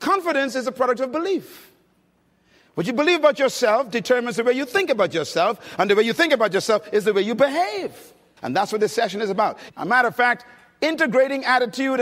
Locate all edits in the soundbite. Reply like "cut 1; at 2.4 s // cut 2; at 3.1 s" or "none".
cut 1; at 8.4 s // cut 2; at 9.7 s